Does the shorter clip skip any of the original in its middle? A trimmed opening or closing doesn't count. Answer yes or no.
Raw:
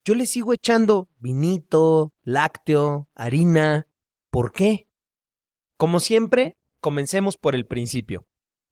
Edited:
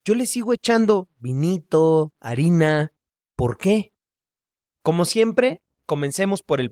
yes